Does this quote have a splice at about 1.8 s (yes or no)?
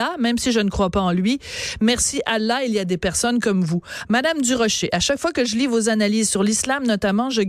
no